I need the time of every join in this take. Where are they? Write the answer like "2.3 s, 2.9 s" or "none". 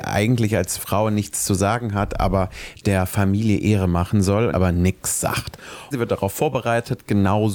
4.5 s, 5.9 s

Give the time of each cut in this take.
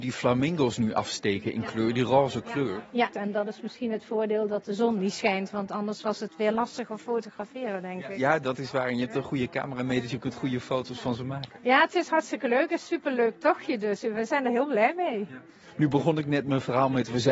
3.1 s

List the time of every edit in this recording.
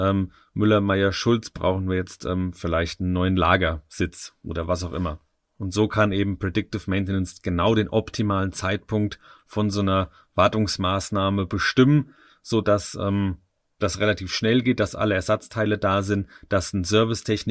none

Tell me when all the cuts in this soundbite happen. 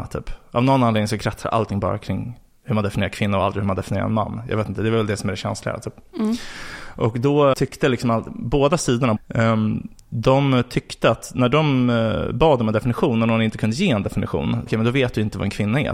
7.5 s, 9.2 s, 14.7 s

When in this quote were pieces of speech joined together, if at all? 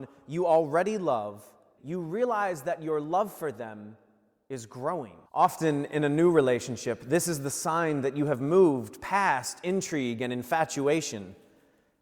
1.8 s, 5.3 s

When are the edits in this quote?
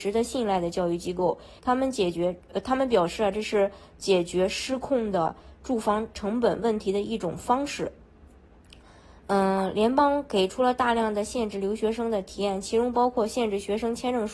1.6 s

